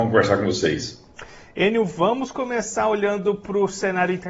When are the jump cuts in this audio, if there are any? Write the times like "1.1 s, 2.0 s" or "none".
none

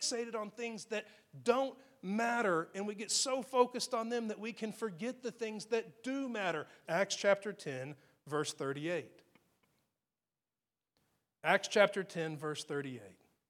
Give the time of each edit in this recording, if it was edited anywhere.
6.8 s

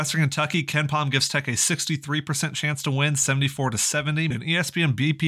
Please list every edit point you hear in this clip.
4.3 s

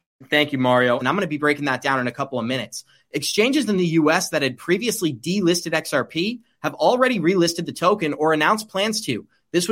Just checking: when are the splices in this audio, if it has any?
1.0 s

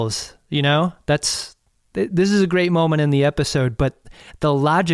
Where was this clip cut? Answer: none

